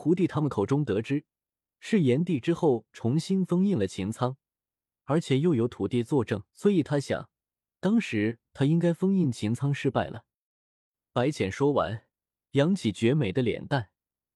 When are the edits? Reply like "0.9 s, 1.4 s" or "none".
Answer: 6.5 s